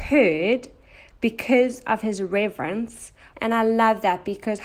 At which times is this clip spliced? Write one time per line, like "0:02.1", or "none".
0:03.3